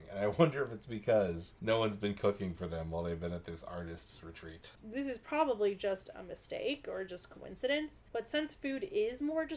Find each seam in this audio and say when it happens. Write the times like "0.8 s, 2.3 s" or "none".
4.8 s